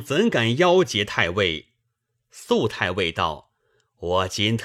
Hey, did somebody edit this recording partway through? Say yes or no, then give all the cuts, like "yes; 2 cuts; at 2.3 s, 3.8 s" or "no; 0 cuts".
yes; 1 cut; at 1.8 s